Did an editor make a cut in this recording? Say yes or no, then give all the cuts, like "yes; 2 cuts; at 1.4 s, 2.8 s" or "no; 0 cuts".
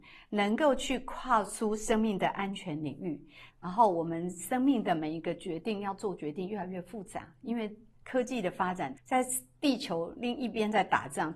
yes; 2 cuts; at 3.5 s, 8.9 s